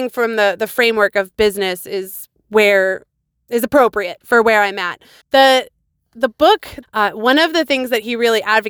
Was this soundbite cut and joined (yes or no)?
yes